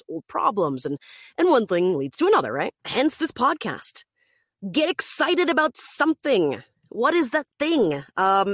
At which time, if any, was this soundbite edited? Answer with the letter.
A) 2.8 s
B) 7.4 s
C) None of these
A